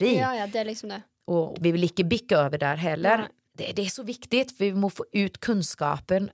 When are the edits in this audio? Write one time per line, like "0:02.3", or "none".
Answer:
0:01.5
0:03.5

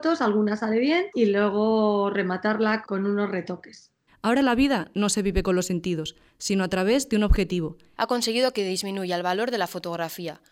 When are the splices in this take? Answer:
0:02.8
0:04.1
0:07.9

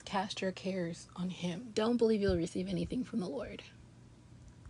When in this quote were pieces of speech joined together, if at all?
0:01.7

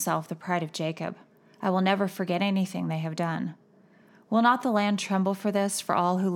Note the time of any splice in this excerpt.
none

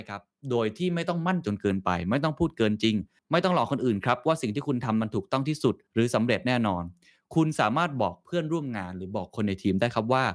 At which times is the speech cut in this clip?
0:01.4

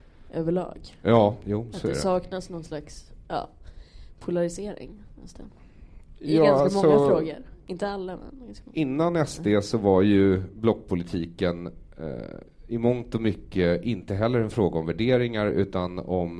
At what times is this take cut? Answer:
none

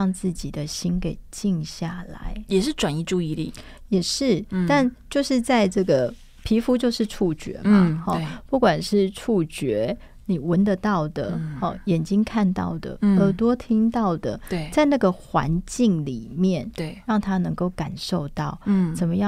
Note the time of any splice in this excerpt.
none

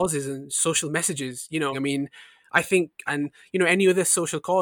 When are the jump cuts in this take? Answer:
0:01.7
0:03.1

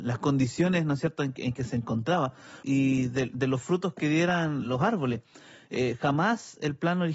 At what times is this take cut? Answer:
0:02.6

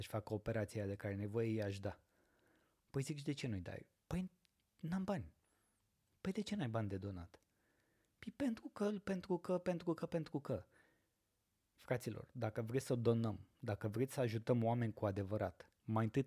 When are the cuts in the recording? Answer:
none

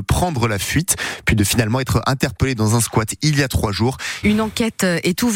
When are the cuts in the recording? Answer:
0:04.2

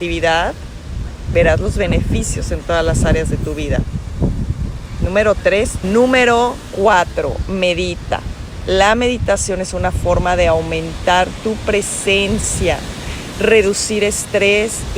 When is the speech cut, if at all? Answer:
0:05.8

